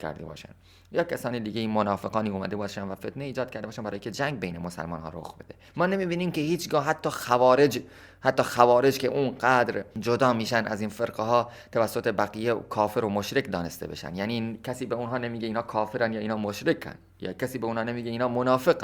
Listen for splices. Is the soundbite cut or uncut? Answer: uncut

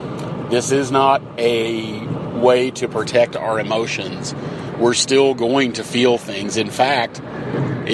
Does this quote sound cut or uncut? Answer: uncut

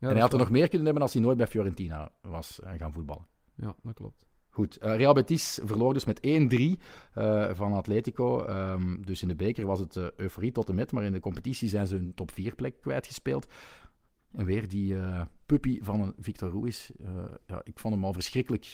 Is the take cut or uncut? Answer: uncut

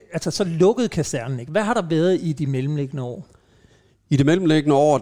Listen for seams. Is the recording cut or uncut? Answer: uncut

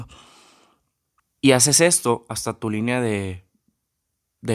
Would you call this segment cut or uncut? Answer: cut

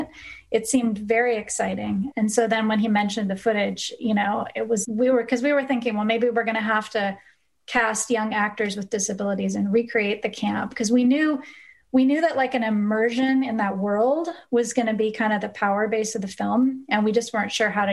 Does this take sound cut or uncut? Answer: cut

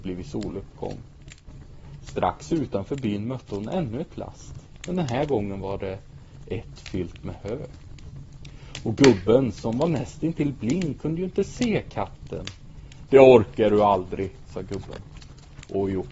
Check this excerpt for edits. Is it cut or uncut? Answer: cut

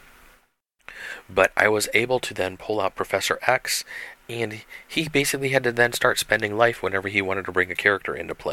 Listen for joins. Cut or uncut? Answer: uncut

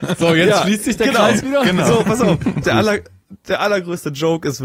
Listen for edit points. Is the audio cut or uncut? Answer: cut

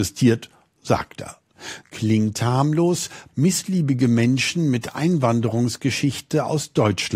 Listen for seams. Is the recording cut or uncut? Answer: cut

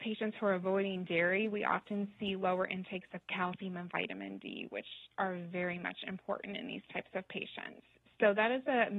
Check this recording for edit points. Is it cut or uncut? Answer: uncut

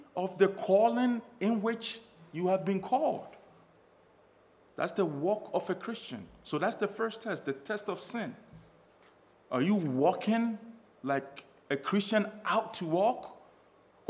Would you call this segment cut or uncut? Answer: uncut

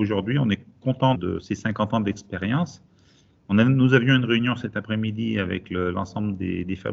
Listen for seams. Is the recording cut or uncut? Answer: cut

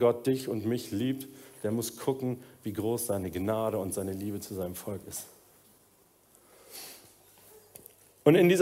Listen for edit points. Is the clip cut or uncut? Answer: uncut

